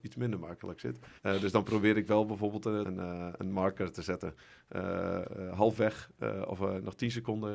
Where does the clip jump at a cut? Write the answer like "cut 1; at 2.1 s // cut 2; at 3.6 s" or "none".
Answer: cut 1; at 1.2 s // cut 2; at 2.8 s